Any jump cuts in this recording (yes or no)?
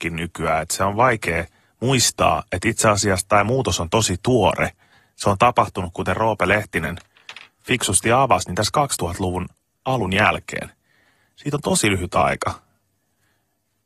no